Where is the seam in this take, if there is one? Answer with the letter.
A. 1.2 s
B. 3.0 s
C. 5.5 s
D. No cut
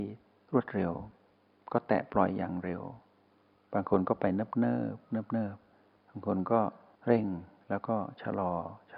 D